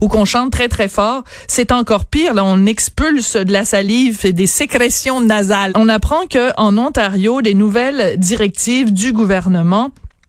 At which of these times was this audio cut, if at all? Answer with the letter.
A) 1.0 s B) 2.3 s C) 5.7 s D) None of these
C